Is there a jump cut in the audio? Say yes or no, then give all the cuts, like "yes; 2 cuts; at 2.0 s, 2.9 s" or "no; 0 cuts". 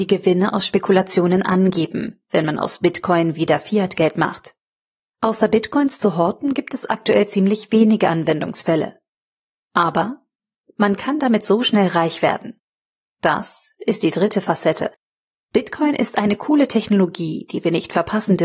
no; 0 cuts